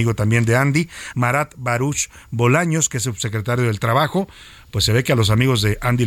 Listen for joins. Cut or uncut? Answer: cut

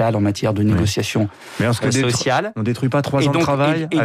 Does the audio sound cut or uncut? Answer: uncut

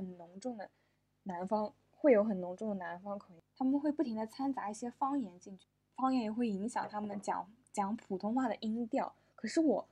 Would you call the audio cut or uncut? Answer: uncut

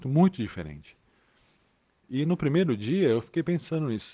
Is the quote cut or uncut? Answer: uncut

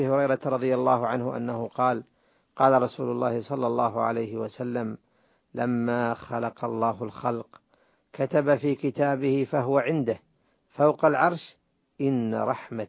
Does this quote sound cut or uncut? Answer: uncut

